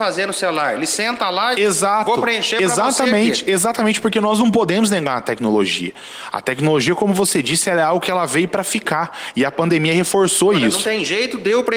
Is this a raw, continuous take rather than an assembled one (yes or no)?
yes